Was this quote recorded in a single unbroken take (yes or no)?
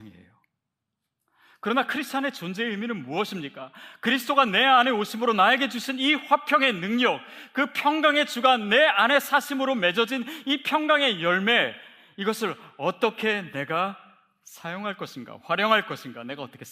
yes